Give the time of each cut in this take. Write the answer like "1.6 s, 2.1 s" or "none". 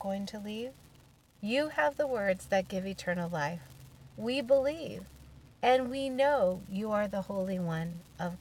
1.3 s